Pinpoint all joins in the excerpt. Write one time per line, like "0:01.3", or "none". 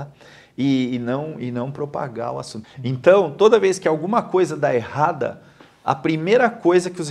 0:02.6